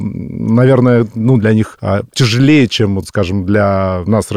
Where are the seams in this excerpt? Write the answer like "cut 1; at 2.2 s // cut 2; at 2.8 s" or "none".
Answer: none